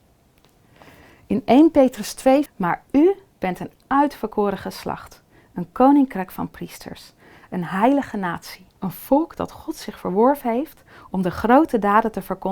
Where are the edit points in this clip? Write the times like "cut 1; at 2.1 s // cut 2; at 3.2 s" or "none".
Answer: cut 1; at 2.5 s // cut 2; at 8.8 s